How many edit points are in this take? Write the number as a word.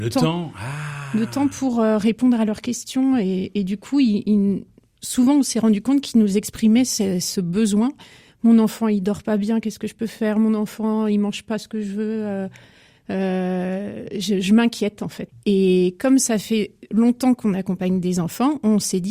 one